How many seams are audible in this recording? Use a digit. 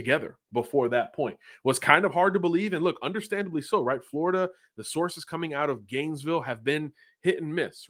0